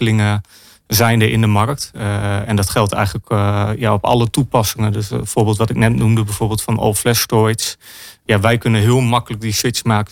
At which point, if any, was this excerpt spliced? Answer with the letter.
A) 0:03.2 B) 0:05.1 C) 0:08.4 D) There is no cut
D